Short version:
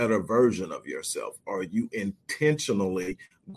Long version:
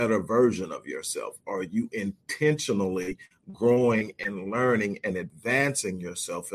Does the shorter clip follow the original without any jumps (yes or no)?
yes